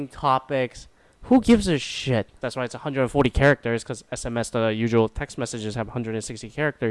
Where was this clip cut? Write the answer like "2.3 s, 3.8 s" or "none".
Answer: 2.4 s